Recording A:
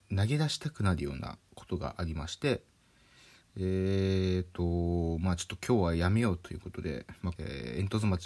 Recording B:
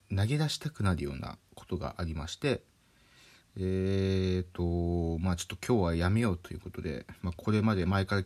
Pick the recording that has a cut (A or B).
A